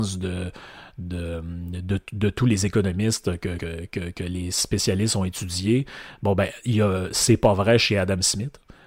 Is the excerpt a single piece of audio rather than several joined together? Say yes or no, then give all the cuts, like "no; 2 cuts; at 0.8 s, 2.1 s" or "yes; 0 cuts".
yes; 0 cuts